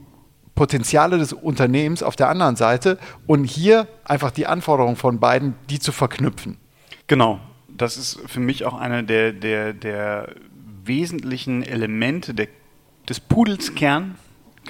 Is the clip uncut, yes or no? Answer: no